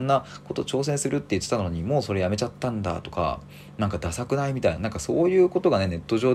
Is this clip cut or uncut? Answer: cut